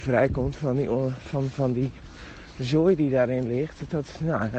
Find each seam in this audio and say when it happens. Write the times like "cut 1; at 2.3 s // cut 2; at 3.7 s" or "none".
none